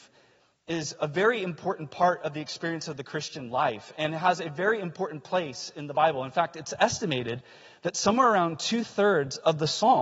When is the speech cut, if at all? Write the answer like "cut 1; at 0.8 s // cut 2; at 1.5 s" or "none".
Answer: none